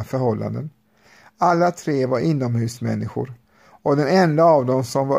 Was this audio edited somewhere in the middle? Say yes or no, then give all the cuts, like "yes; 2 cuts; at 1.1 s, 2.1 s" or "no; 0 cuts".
no; 0 cuts